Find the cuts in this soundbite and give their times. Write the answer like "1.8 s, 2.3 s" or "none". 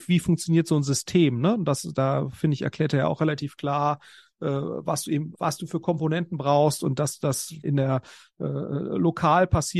5.3 s, 7.6 s